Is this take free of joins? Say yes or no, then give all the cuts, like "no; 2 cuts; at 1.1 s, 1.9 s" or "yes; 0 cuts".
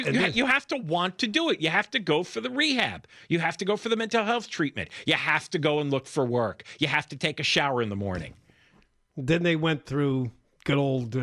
yes; 0 cuts